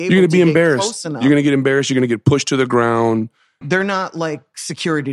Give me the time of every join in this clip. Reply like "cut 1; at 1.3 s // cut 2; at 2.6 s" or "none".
cut 1; at 3.6 s